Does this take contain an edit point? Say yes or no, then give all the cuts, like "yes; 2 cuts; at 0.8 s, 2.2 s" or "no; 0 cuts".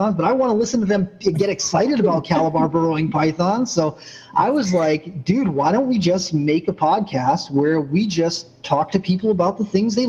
no; 0 cuts